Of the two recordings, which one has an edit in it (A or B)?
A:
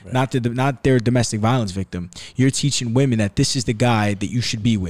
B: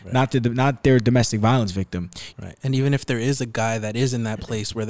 B